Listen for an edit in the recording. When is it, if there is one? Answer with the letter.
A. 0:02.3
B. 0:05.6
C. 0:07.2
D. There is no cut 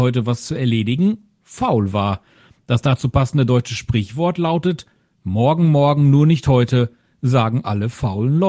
D